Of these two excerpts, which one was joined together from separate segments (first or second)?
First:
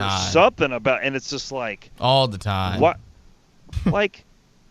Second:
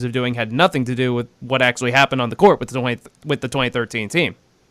first